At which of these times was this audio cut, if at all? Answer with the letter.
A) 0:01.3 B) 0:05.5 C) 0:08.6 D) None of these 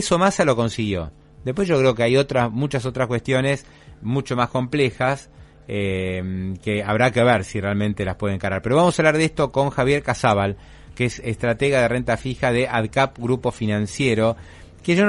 D